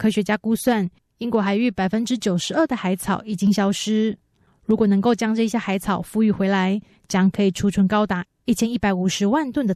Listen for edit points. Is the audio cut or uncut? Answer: uncut